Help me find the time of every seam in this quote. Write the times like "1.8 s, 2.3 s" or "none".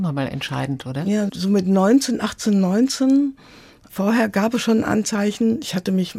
1.3 s